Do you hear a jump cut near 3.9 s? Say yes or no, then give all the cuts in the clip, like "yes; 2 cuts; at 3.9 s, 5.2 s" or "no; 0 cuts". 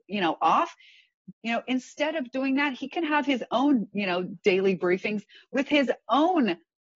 no; 1 cut; at 1.3 s